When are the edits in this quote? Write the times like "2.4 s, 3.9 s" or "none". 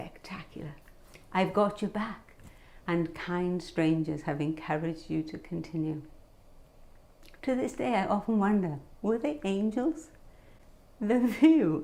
2.8 s, 7.4 s